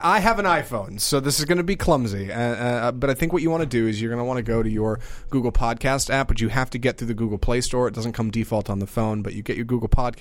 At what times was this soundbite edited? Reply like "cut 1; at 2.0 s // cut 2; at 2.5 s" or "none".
none